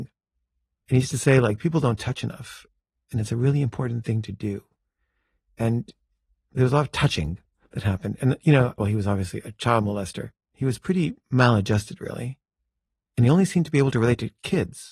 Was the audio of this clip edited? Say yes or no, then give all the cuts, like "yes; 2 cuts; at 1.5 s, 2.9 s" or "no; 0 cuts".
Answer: yes; 2 cuts; at 8.8 s, 10.5 s